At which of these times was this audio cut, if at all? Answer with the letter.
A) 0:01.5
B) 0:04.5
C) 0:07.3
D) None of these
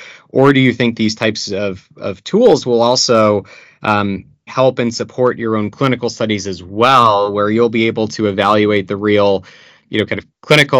B